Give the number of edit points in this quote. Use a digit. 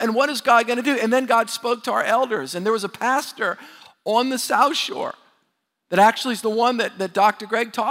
0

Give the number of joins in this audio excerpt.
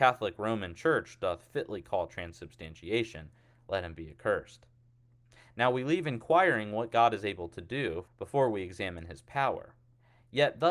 1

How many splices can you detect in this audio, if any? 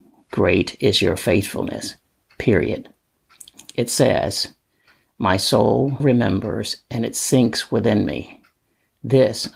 2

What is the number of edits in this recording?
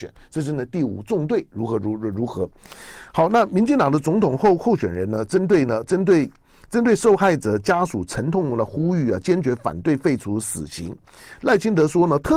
0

